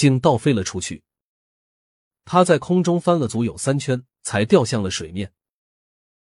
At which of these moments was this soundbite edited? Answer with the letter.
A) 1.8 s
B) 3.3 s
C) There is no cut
B